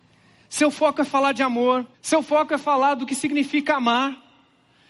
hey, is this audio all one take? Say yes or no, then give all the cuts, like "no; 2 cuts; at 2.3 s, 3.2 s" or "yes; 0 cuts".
no; 1 cut; at 1.9 s